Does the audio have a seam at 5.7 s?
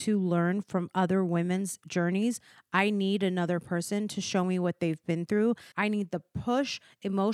yes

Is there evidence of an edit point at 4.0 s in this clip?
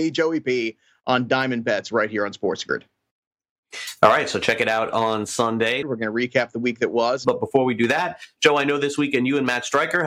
no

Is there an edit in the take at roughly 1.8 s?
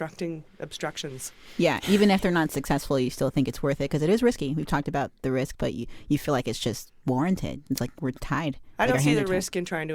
no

